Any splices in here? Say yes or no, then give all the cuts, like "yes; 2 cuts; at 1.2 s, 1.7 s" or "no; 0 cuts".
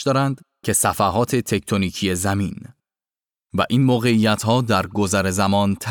no; 0 cuts